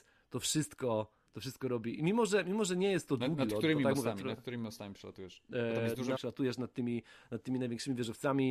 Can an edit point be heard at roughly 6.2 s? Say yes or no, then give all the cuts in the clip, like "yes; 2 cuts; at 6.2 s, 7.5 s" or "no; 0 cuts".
yes; 1 cut; at 6.2 s